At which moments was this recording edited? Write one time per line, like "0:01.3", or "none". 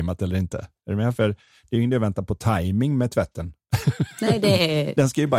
none